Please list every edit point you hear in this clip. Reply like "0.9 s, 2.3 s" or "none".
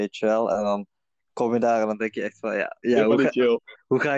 2.8 s